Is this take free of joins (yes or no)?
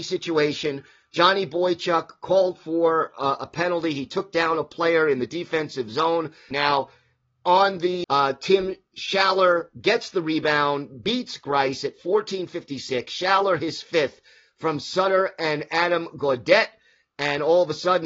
no